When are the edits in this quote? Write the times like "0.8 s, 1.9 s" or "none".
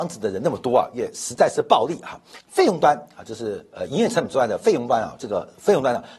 2.4 s